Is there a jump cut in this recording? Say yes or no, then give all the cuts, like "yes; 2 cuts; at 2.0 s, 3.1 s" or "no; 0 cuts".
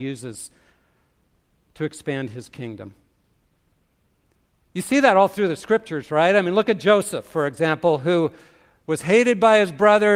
no; 0 cuts